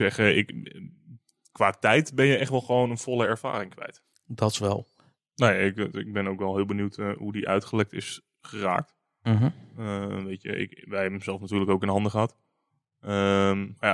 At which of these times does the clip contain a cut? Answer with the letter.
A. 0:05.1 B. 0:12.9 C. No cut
A